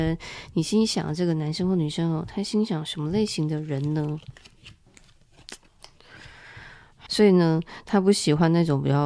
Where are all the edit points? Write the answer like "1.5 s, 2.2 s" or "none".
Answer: 7.1 s

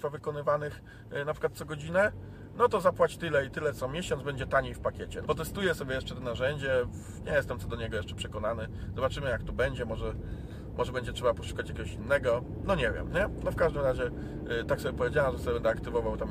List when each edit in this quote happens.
5.2 s

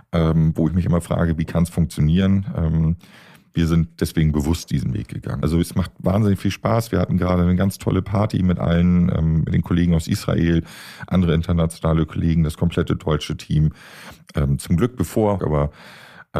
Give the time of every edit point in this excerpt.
5.4 s, 15.4 s

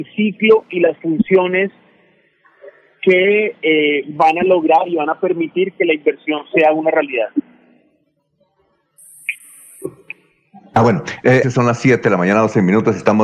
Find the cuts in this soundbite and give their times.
11.4 s

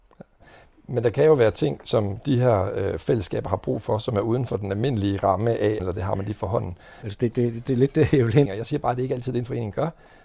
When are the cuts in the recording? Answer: 5.8 s, 7.0 s, 8.5 s

